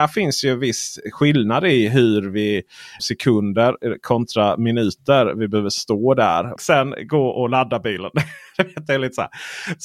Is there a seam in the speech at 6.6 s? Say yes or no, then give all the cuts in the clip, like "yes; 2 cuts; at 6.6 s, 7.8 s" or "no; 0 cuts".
yes; 2 cuts; at 3.0 s, 6.6 s